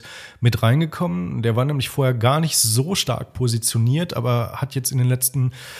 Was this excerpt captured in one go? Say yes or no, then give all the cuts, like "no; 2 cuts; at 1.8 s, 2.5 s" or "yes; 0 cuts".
yes; 0 cuts